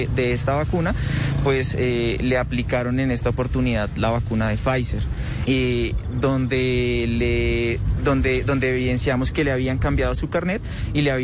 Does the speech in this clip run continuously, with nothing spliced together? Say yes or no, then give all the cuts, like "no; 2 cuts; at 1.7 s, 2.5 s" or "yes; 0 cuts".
no; 1 cut; at 5.5 s